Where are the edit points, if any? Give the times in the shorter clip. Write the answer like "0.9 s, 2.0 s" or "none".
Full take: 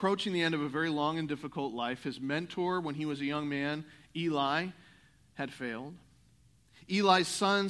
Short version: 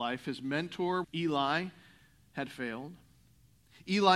1.0 s